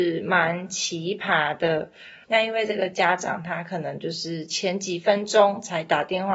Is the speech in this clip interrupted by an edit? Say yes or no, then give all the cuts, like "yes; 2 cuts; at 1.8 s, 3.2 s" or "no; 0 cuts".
yes; 1 cut; at 2.2 s